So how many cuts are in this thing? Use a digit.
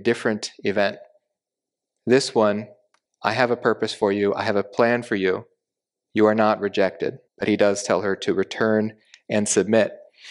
2